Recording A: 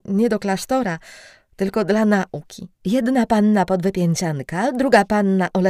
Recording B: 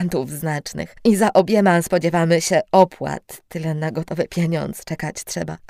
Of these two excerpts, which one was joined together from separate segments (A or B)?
A